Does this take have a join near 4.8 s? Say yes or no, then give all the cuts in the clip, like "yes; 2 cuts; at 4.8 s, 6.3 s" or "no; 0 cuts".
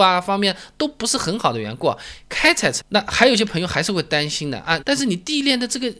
yes; 2 cuts; at 2.8 s, 4.8 s